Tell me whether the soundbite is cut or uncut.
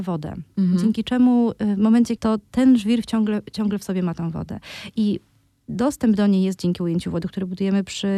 cut